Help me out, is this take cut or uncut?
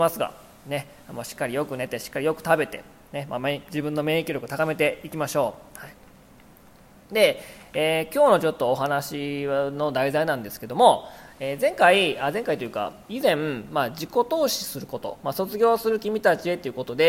uncut